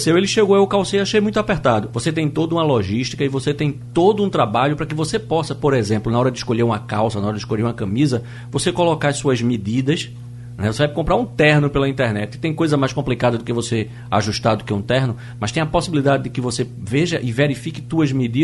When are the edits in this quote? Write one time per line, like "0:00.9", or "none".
0:01.9